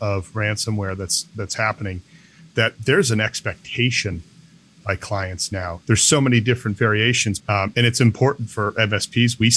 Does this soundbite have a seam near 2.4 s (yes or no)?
no